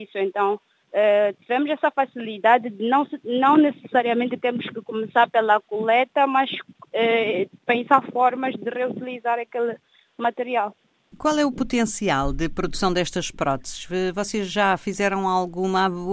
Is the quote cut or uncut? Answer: uncut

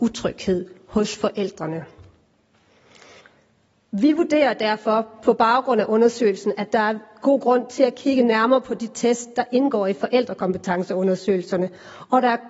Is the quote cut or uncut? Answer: uncut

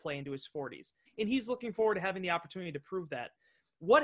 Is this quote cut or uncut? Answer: cut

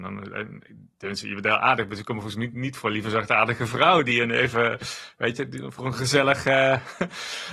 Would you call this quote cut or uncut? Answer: uncut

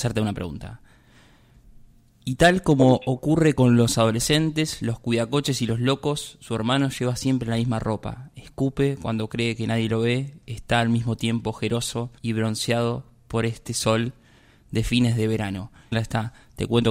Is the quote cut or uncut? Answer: cut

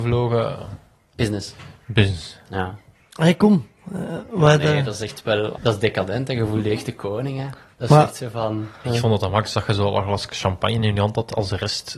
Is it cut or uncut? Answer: cut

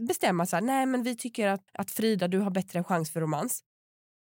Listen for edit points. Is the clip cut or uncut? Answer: cut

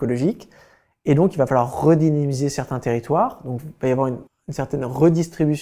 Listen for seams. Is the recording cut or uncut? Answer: cut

